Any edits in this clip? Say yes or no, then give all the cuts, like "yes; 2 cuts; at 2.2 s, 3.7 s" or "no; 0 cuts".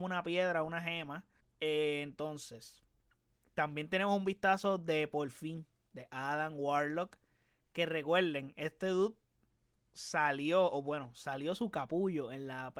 yes; 1 cut; at 1.4 s